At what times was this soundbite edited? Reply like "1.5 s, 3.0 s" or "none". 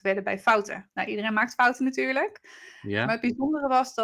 none